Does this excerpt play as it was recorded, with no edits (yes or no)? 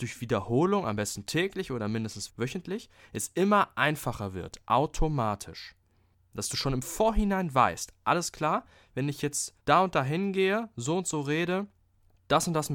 no